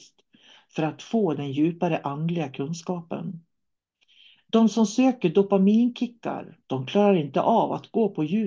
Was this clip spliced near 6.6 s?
yes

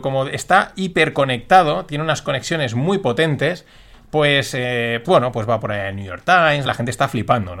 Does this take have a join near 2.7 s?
no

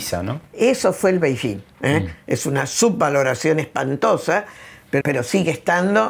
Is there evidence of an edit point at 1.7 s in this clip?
yes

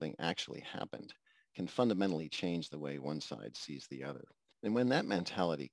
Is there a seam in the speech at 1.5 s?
no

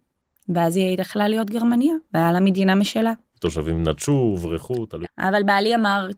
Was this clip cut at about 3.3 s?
yes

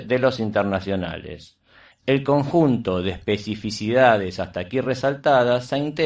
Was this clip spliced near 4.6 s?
no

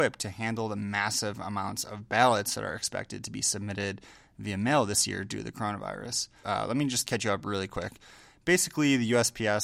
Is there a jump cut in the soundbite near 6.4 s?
yes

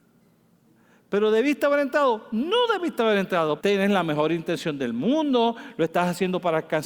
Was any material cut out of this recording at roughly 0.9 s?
no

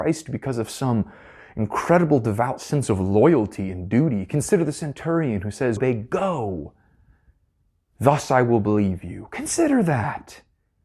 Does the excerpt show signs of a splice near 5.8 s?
yes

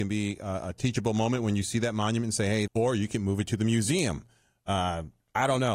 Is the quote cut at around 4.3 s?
no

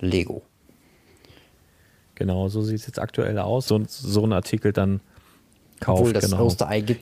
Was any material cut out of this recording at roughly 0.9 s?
no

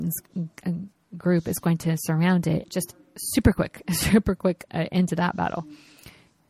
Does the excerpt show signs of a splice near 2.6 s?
yes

